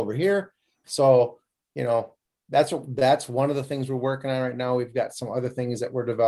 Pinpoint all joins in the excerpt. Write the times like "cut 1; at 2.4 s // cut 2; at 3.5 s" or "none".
none

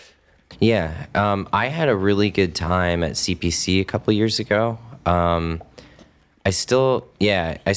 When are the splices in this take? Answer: none

